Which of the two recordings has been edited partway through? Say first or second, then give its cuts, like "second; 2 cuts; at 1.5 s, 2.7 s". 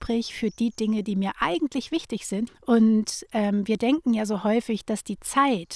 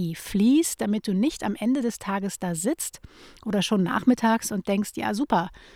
first; 1 cut; at 2.5 s